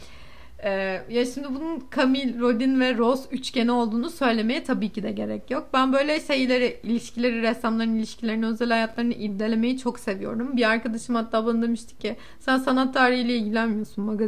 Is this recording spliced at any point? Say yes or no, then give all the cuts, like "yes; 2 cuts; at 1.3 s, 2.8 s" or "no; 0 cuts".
no; 0 cuts